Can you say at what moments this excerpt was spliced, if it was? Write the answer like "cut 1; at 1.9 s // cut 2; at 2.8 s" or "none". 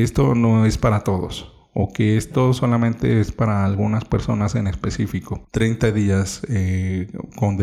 cut 1; at 5.5 s